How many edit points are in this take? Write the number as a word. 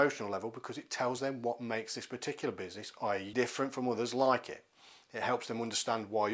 one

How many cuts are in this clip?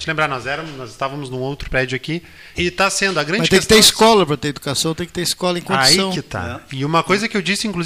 one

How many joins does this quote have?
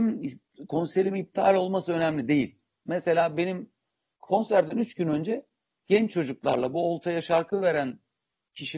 one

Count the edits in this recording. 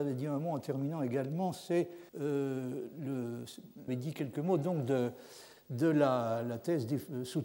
two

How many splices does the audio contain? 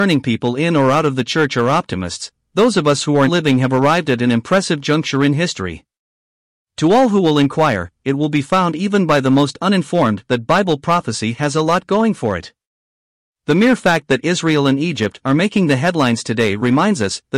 one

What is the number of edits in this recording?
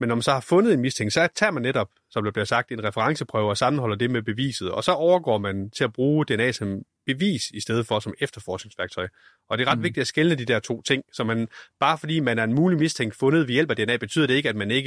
zero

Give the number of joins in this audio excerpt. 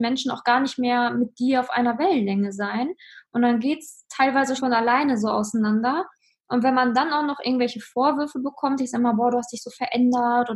one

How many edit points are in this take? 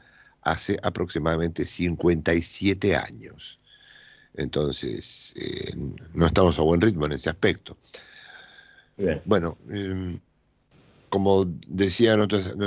one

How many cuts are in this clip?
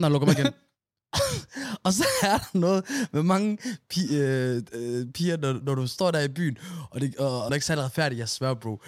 two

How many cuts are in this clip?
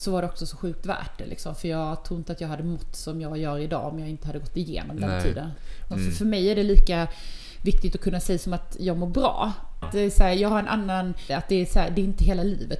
three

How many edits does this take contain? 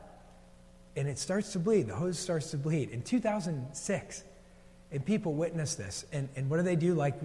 zero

